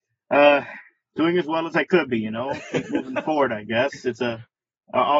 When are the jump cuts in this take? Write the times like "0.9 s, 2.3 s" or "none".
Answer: none